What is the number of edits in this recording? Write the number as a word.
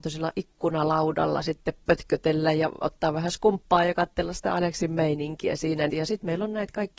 one